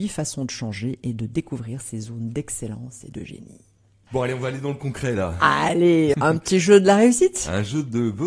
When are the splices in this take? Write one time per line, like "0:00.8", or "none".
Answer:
0:06.1

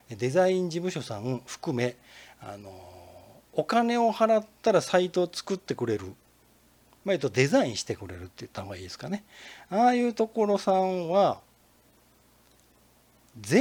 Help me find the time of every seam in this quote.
none

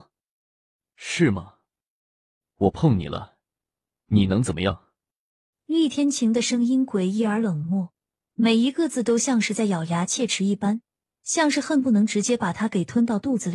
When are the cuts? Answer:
0:05.5

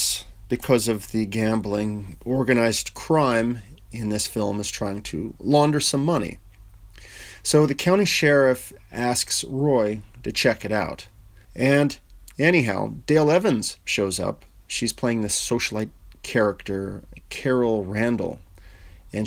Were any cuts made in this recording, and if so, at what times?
0:11.4

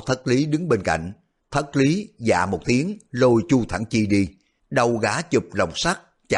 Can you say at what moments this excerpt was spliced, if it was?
0:01.4
0:04.6

